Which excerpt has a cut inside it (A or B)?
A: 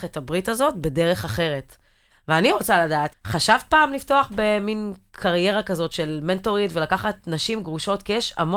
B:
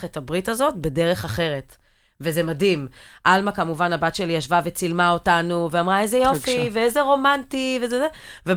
A